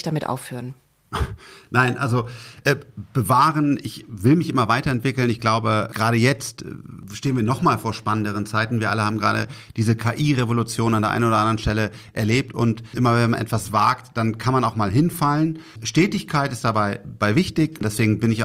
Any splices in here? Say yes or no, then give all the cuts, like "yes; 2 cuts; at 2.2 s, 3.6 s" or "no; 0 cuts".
no; 0 cuts